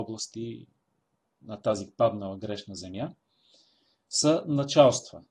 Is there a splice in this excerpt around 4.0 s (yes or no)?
no